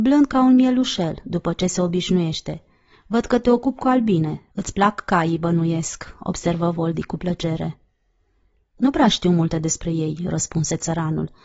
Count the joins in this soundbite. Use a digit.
1